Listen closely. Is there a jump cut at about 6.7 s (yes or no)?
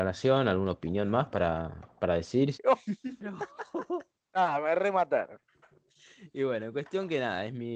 no